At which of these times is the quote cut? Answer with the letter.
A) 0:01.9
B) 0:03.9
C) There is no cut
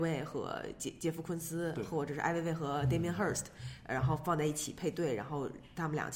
C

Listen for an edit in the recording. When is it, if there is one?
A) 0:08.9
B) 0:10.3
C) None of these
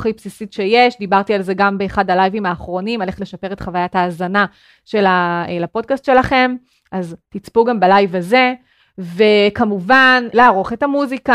B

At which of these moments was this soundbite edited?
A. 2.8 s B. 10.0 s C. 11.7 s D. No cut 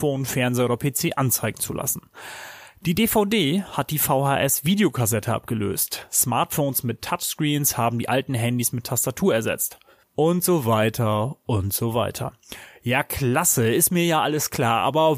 B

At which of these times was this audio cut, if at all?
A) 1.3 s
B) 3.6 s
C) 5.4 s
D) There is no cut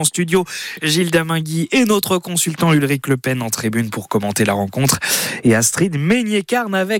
D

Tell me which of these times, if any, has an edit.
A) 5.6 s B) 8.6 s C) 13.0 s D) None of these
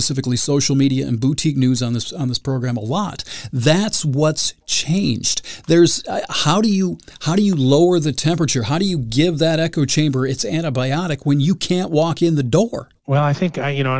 C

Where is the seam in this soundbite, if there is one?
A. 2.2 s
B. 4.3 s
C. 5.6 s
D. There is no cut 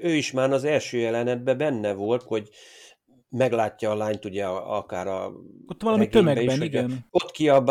A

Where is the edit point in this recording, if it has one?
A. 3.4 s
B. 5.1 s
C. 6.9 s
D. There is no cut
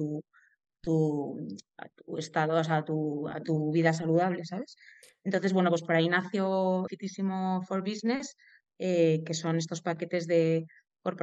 C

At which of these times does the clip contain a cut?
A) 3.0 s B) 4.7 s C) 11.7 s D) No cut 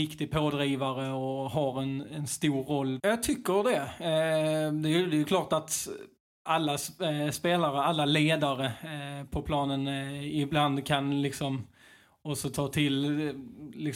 A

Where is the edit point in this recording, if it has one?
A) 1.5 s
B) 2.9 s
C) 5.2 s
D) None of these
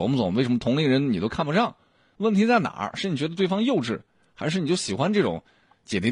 D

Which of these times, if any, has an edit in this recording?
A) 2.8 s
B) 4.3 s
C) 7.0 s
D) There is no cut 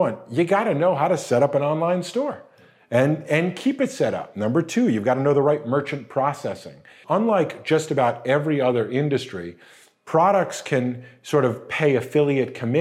C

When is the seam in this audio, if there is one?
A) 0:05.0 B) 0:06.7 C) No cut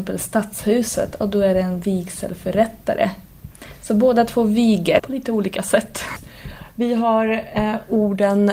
A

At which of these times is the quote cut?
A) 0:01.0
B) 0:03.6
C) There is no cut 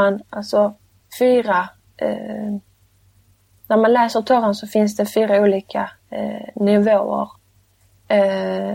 A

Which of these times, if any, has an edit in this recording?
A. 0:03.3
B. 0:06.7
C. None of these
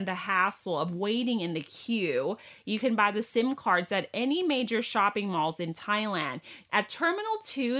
B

